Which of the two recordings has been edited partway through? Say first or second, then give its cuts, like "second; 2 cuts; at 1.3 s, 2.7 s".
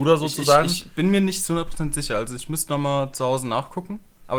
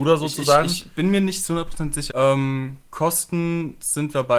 second; 1 cut; at 2.1 s